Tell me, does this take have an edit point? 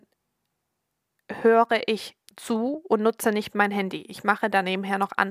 no; 0 cuts

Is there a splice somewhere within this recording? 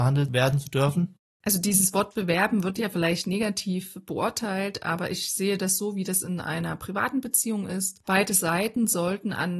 no; 0 cuts

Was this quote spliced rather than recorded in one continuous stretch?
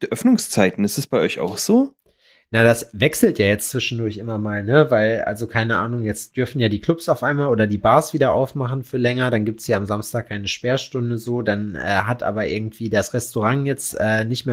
no; 0 cuts

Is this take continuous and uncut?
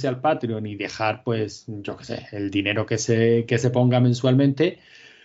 yes; 0 cuts

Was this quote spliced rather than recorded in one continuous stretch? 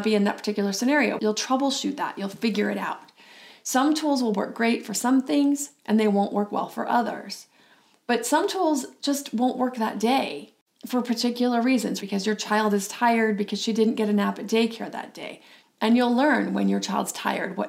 yes; 3 cuts; at 1.2 s, 12.0 s, 15.6 s

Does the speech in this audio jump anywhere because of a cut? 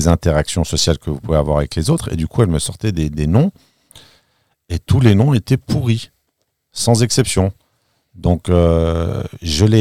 no; 0 cuts

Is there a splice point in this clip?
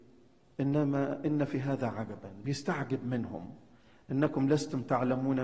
no; 0 cuts

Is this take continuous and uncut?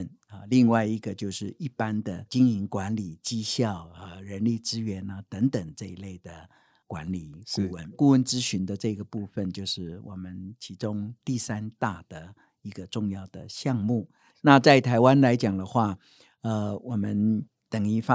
no; 2 cuts; at 7.9 s, 14.3 s

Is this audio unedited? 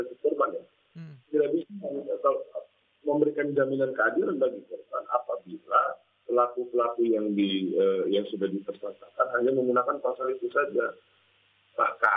yes; 0 cuts

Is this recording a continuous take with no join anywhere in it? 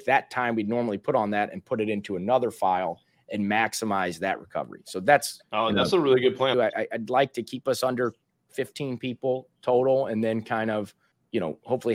no; 2 cuts; at 5.4 s, 6.5 s

